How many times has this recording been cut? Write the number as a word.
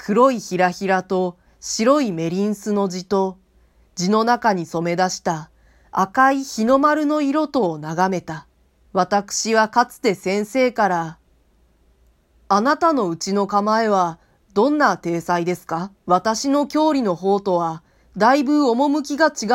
two